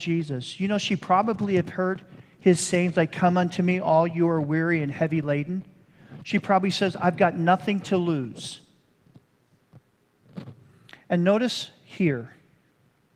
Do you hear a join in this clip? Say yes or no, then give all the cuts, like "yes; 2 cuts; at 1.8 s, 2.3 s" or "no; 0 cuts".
no; 0 cuts